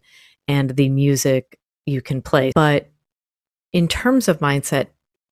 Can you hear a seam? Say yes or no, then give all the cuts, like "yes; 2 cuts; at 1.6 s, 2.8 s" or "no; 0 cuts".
yes; 1 cut; at 2.5 s